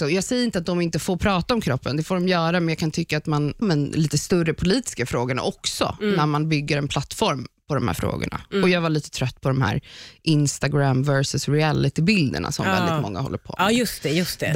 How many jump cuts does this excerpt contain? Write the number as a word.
one